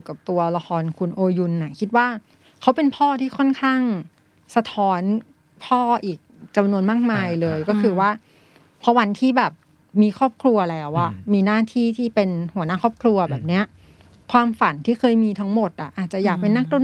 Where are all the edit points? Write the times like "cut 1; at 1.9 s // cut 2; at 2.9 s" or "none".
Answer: none